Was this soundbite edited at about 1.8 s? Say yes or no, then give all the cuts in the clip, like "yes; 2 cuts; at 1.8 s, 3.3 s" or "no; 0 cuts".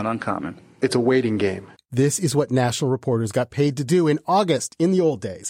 yes; 1 cut; at 1.8 s